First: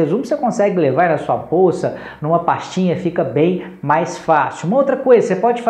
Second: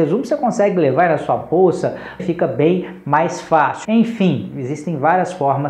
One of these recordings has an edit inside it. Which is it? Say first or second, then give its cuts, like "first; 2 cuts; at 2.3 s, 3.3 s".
second; 2 cuts; at 2.2 s, 3.8 s